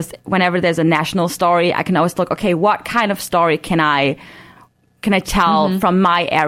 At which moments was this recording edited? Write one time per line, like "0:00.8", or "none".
none